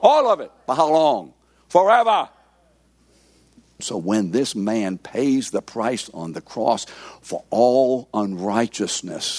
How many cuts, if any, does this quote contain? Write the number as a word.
one